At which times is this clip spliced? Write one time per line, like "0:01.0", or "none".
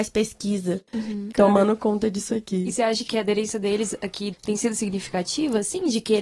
0:01.3
0:04.3